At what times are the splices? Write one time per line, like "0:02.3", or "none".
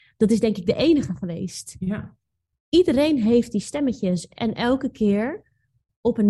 none